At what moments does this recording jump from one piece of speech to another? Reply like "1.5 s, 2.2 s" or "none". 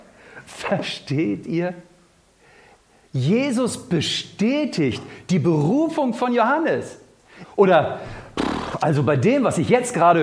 7.4 s